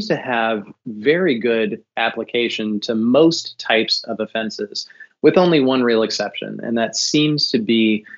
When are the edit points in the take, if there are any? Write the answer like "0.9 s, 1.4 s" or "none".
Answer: none